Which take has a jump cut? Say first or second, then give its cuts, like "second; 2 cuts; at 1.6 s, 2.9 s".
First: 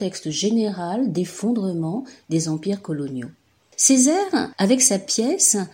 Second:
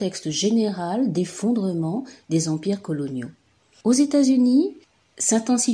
first; 1 cut; at 3.7 s